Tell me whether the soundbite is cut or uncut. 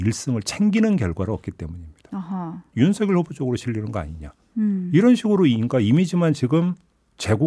cut